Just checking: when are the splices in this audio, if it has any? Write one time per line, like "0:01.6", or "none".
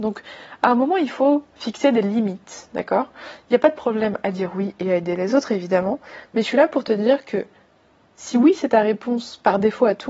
none